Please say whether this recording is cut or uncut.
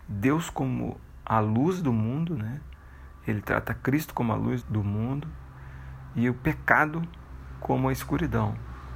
cut